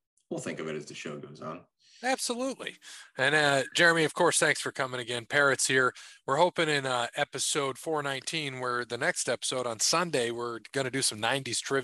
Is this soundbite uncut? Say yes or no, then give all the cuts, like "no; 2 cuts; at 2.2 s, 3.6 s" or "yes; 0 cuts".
yes; 0 cuts